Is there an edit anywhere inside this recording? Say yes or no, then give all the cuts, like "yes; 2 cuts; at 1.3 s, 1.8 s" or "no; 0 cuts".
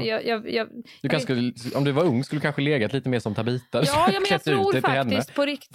no; 0 cuts